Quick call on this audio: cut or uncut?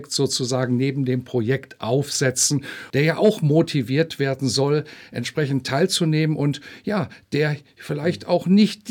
cut